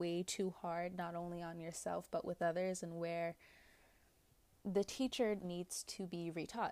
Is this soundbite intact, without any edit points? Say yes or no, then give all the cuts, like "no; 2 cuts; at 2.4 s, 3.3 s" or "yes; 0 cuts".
no; 1 cut; at 5.4 s